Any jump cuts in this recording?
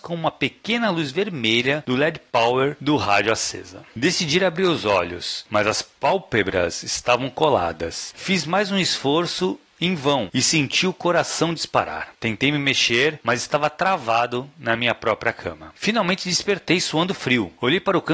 no; 0 cuts

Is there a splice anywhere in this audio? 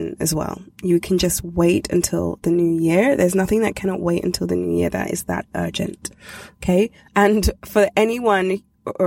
yes; 1 cut; at 7.1 s

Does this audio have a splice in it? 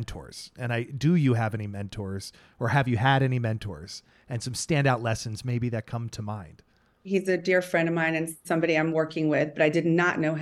yes; 1 cut; at 7.0 s

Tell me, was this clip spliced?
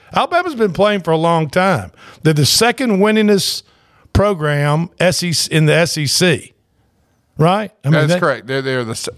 no; 0 cuts

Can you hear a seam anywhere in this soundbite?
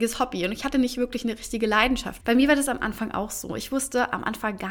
yes; 1 cut; at 2.2 s

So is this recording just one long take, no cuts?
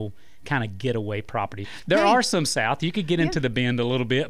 no; 1 cut; at 1.6 s

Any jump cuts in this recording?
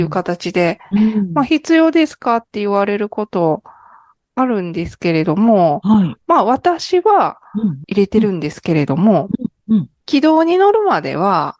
yes; 1 cut; at 0.9 s

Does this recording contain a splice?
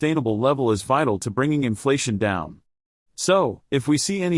no; 0 cuts

